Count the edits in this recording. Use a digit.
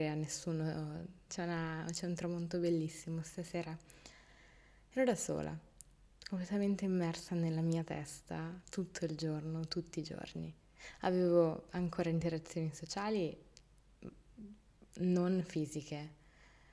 1